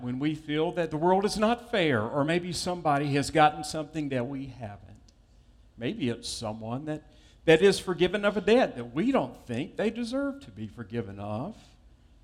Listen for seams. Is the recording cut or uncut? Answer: uncut